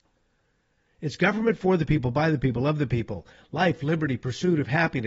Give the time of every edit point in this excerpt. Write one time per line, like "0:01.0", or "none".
none

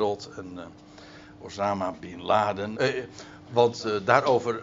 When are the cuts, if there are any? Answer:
0:02.7

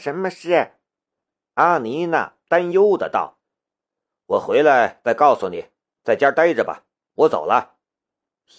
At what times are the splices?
0:03.4

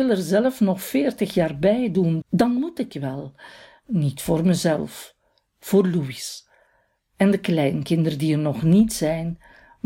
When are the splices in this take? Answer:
0:02.2

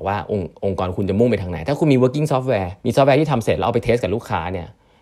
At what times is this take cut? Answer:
0:02.8

